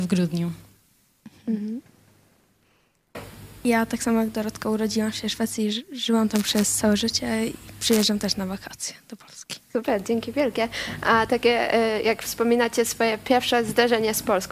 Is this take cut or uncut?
cut